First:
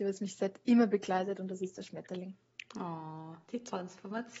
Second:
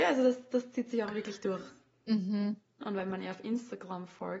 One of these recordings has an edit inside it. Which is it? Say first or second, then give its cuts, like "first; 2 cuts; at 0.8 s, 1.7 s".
second; 1 cut; at 2.8 s